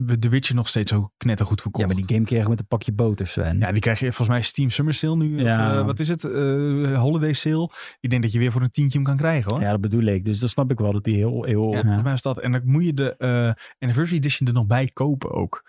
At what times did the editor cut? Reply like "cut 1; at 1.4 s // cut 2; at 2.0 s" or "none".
cut 1; at 11.8 s